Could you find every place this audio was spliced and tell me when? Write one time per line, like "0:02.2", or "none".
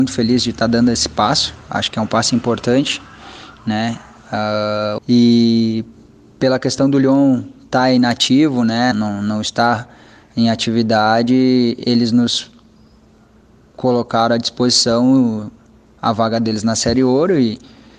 0:05.0
0:08.9